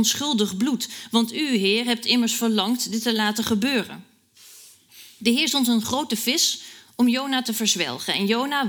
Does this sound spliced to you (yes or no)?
yes